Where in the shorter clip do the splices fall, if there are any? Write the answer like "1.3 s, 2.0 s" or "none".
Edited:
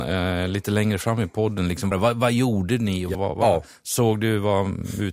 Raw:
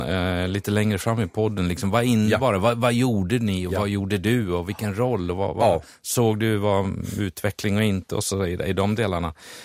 1.9 s, 3.1 s